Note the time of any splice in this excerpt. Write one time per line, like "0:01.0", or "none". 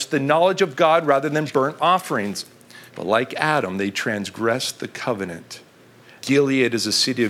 0:02.9
0:06.2